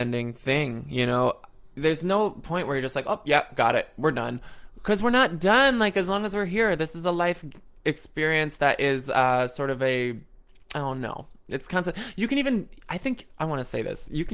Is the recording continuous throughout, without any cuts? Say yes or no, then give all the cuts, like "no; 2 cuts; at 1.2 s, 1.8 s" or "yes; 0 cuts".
yes; 0 cuts